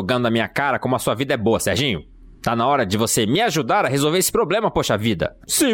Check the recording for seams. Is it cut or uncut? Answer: uncut